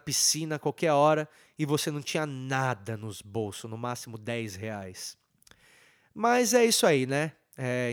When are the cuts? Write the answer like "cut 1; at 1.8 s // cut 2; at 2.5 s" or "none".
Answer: none